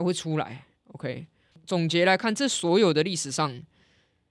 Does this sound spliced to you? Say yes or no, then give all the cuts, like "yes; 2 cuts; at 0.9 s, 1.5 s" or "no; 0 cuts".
yes; 1 cut; at 1.5 s